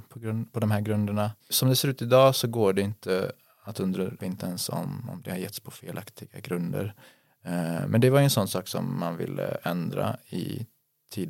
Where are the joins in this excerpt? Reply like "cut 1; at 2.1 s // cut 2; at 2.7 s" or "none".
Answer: cut 1; at 1.4 s // cut 2; at 4.2 s

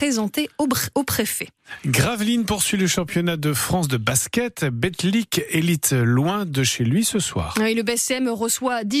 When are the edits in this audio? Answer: none

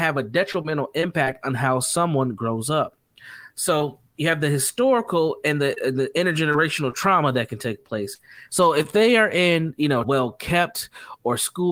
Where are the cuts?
cut 1; at 8.5 s // cut 2; at 10.0 s

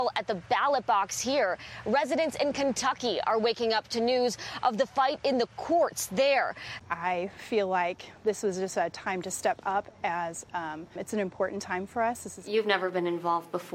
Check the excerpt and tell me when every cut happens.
cut 1; at 6.8 s // cut 2; at 11.0 s

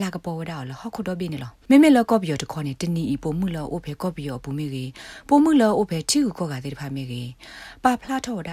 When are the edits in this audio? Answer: cut 1; at 1.6 s

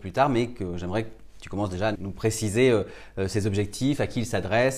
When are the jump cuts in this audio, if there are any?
cut 1; at 2.0 s

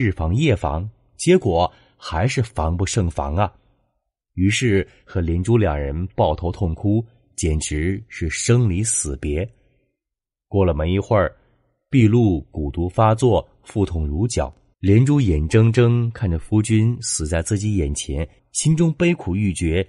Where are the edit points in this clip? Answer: cut 1; at 14.7 s // cut 2; at 18.4 s

